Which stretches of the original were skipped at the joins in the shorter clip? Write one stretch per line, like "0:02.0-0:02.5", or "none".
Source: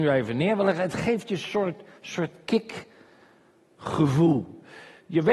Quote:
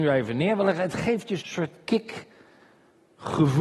0:01.4-0:02.0